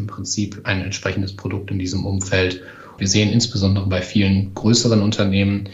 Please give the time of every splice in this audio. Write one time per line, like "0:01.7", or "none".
0:03.0